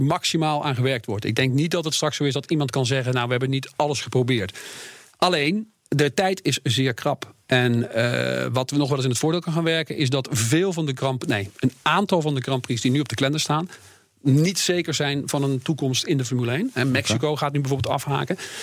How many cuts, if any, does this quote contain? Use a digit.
0